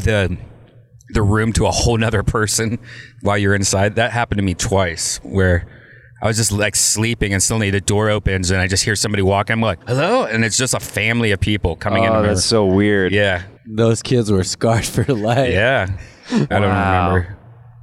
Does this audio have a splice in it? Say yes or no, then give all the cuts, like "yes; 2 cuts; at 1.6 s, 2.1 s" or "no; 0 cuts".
yes; 3 cuts; at 9.8 s, 13.6 s, 16.5 s